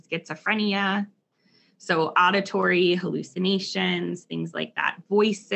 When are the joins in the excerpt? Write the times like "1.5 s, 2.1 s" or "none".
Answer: none